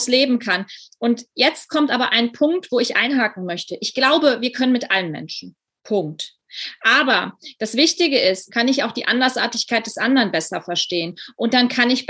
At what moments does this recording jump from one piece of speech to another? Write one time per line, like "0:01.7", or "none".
0:08.5